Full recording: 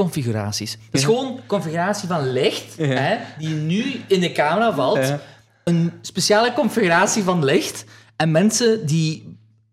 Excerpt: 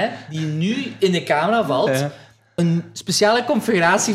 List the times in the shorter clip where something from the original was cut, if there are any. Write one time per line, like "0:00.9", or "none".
none

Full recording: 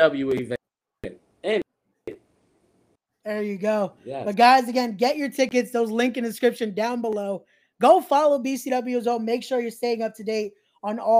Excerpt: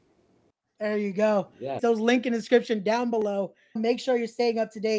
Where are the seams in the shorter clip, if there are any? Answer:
0:01.8
0:03.8

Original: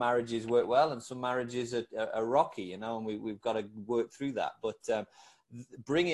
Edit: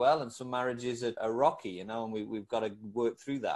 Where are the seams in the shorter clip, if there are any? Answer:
0:01.2

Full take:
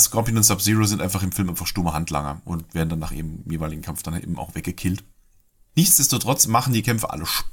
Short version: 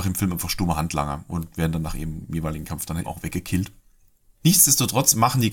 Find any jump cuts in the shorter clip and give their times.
0:03.0

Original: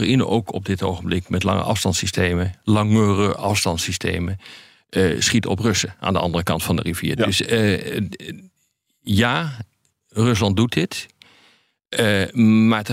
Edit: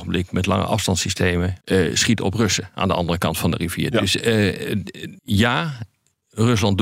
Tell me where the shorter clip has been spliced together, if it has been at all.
0:01.6
0:05.2

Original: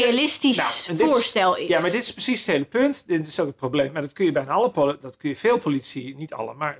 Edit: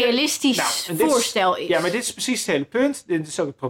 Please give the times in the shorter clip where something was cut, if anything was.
none

